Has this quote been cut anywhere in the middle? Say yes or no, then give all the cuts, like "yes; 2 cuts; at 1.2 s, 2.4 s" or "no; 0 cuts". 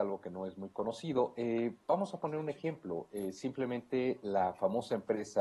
no; 0 cuts